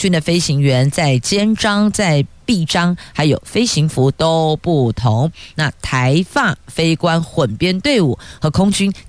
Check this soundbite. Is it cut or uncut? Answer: uncut